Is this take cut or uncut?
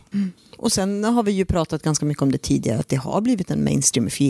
uncut